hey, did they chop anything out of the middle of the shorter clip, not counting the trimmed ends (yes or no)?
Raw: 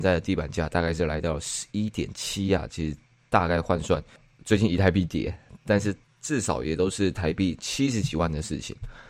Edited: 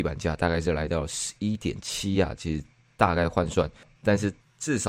yes